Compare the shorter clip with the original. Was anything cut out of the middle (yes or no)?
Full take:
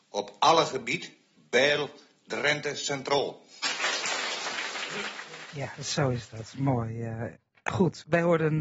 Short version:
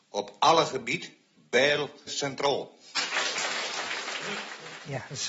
yes